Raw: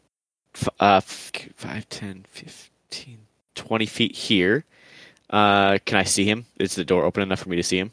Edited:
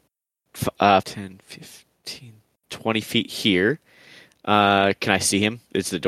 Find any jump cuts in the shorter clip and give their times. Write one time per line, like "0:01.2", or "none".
0:01.0